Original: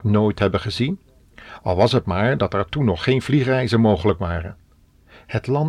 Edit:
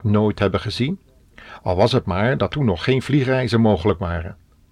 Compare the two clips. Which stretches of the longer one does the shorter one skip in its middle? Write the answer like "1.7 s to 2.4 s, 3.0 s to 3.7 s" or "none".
2.5 s to 2.7 s